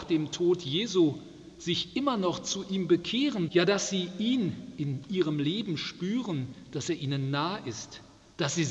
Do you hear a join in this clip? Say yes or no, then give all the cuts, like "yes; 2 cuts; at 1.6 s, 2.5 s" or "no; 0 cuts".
yes; 1 cut; at 3.5 s